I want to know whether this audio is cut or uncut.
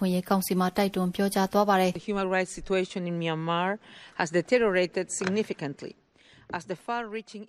uncut